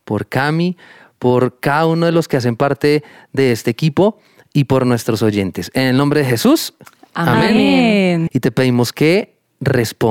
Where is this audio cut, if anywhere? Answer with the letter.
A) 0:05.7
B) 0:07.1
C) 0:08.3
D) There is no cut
C